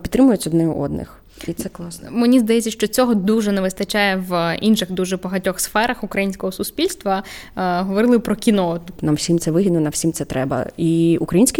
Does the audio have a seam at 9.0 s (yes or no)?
yes